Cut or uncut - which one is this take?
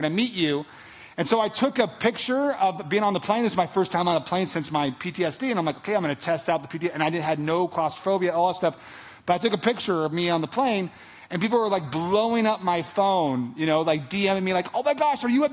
uncut